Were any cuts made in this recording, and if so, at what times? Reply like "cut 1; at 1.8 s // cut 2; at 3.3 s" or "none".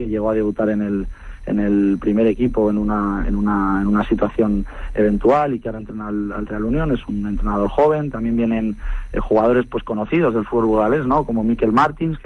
none

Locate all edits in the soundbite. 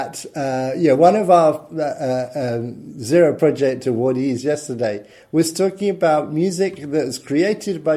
none

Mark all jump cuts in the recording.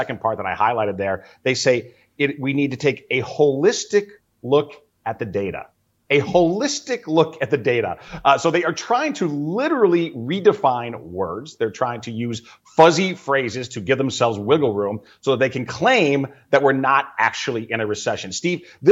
none

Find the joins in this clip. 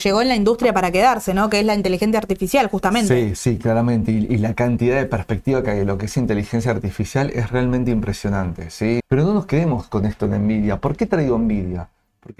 cut 1; at 9.0 s

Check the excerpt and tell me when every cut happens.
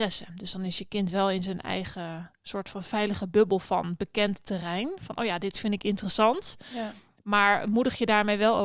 none

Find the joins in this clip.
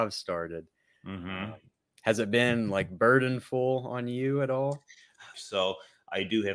cut 1; at 5.3 s

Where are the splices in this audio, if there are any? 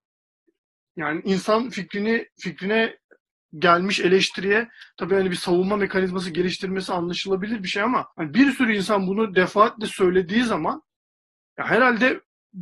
cut 1; at 2.3 s // cut 2; at 8.1 s

